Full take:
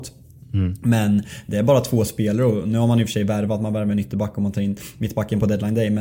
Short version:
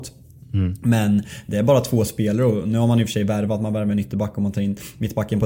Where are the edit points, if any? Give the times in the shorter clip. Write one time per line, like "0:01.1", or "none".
none